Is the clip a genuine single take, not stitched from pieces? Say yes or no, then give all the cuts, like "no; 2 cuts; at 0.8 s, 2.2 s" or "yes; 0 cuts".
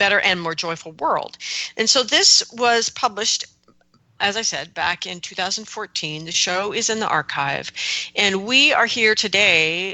no; 1 cut; at 4.2 s